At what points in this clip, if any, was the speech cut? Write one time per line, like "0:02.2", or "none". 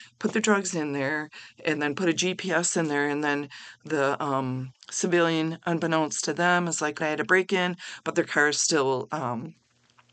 0:07.0